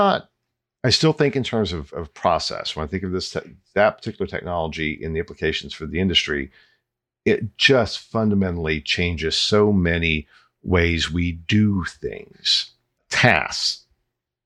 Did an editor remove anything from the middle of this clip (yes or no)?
no